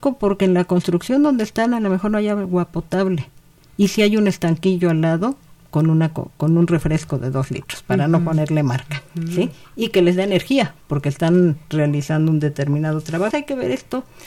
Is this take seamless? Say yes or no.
no